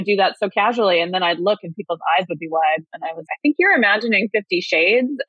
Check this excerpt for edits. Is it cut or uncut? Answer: cut